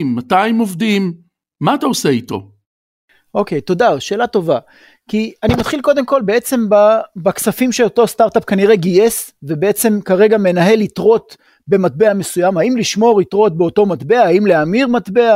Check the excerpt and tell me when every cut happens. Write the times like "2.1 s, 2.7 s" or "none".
none